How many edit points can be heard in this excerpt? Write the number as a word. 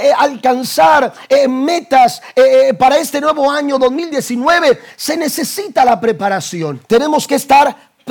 one